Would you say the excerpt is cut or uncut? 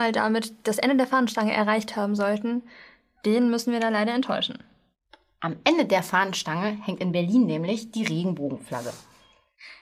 uncut